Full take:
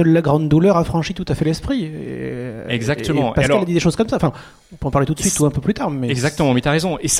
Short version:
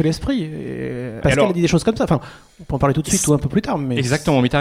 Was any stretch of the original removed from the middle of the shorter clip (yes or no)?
yes